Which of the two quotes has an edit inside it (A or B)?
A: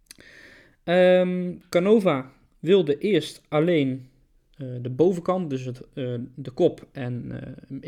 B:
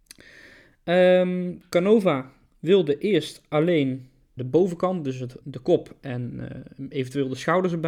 B